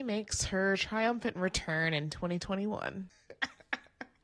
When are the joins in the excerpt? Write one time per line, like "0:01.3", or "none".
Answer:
0:03.1